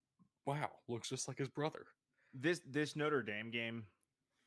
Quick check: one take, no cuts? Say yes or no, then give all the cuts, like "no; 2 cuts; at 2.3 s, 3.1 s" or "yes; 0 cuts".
yes; 0 cuts